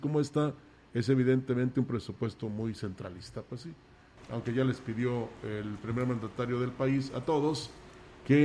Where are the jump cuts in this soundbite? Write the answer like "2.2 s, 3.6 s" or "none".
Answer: none